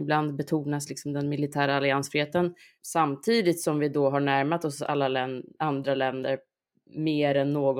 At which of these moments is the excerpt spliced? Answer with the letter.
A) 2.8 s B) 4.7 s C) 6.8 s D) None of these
A